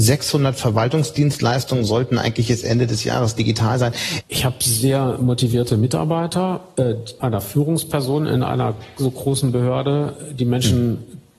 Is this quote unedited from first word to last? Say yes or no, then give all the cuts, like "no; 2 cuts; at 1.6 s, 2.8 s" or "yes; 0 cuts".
no; 2 cuts; at 4.2 s, 7.2 s